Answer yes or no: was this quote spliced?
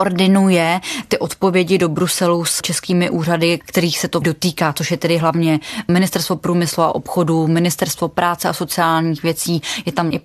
no